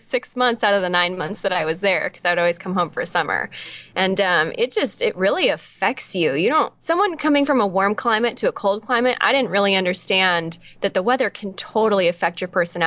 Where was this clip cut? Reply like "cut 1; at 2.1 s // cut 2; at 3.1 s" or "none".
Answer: cut 1; at 6.8 s